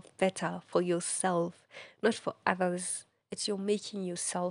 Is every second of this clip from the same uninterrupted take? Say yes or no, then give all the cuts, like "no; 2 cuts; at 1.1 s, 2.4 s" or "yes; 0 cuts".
no; 1 cut; at 3.2 s